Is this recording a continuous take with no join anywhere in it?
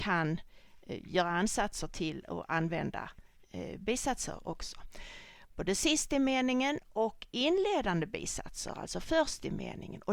no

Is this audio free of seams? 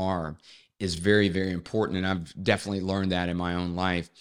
yes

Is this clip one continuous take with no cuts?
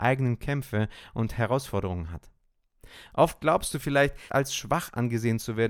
no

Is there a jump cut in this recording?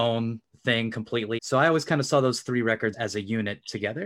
yes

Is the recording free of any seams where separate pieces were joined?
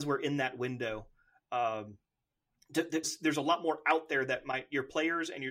no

